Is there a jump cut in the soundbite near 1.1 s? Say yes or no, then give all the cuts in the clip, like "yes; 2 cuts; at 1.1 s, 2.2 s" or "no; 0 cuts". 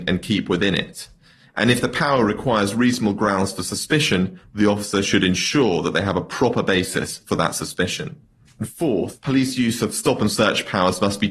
no; 1 cut; at 8.5 s